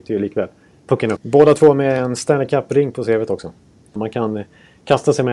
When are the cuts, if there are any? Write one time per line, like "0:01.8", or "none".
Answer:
0:01.2
0:04.0